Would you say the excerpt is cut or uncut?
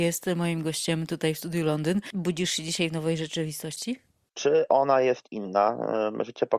cut